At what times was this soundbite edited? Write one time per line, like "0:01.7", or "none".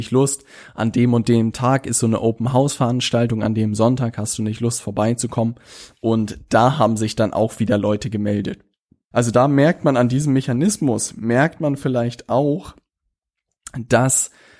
0:09.1